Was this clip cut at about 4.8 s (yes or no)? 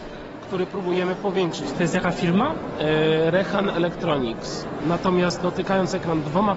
yes